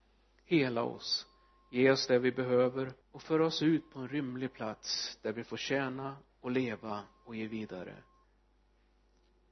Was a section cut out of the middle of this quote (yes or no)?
yes